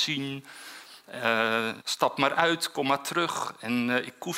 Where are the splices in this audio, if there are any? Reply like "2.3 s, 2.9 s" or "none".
1.8 s